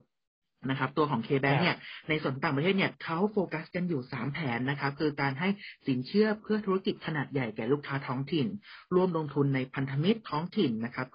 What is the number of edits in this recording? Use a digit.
0